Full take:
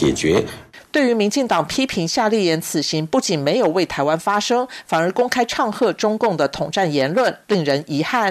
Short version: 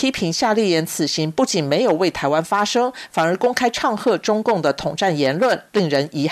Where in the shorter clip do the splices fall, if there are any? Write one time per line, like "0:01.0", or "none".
none